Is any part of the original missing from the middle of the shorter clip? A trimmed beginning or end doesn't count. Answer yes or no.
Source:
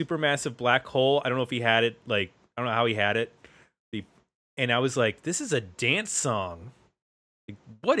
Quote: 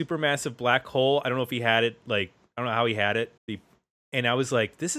yes